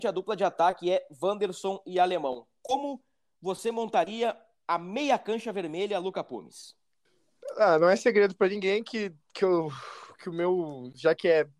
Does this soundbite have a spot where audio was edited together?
no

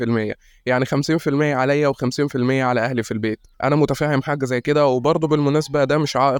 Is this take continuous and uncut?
no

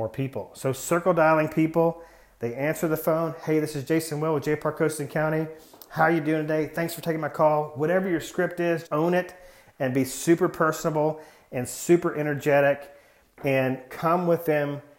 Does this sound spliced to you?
yes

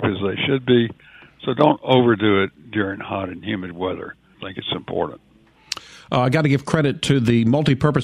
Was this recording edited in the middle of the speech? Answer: yes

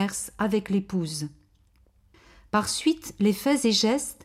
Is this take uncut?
yes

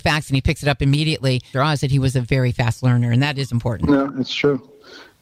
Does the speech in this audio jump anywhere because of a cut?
yes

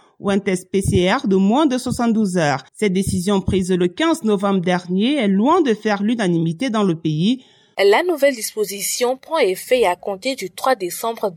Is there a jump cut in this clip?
yes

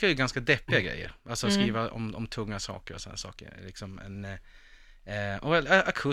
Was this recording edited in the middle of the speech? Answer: no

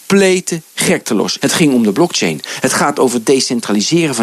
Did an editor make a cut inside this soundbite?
yes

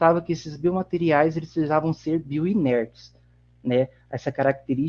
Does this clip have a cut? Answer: no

